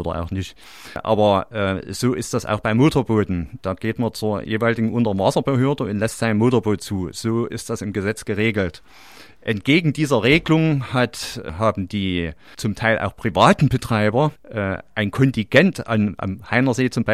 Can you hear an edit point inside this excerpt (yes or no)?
no